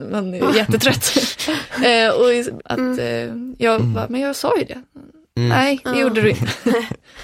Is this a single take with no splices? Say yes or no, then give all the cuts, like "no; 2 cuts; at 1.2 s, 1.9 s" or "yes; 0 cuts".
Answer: no; 1 cut; at 2.6 s